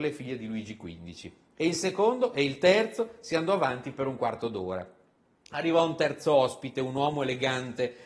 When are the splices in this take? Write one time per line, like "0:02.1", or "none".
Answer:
none